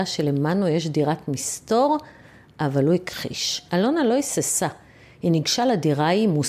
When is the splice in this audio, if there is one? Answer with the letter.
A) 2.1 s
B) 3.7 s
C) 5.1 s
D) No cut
B